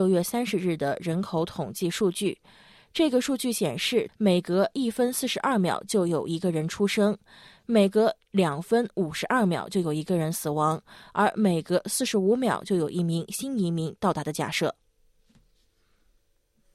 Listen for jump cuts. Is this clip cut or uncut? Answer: cut